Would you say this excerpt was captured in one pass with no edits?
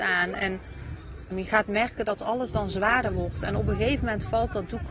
no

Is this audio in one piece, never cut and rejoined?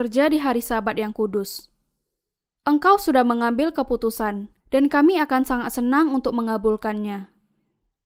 no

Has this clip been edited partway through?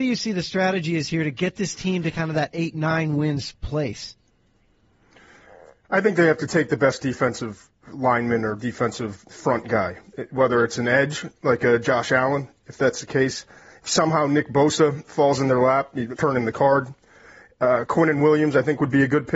yes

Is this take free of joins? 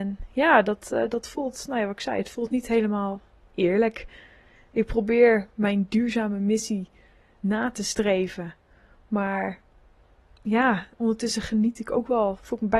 yes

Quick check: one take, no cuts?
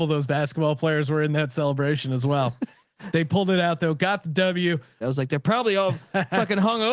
no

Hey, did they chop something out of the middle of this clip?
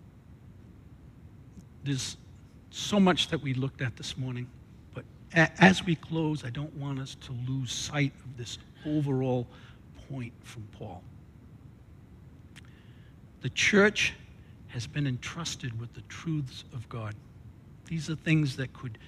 no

